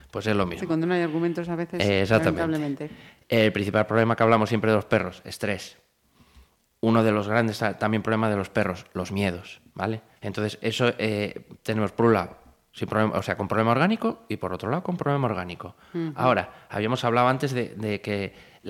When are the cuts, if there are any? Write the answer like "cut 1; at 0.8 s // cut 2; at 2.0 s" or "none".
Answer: cut 1; at 10.2 s